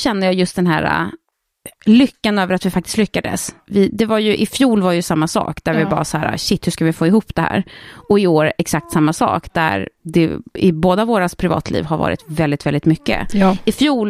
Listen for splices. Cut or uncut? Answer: uncut